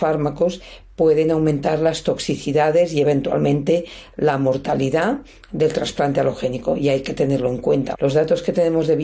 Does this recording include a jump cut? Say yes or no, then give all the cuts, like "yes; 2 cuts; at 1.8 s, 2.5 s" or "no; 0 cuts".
yes; 1 cut; at 7.9 s